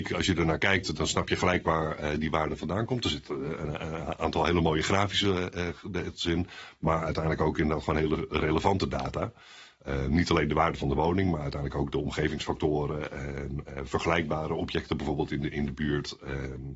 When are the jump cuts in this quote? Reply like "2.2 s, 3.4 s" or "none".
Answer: none

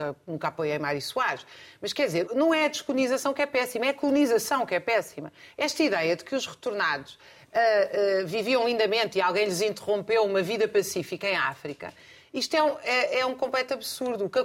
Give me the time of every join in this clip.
2.3 s

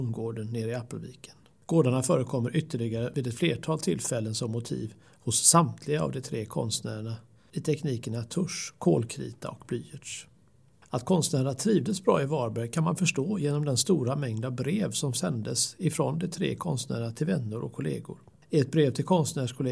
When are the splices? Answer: 1.6 s

